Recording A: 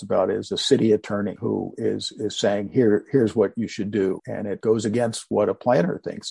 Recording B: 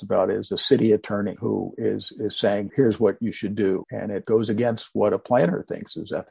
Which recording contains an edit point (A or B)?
B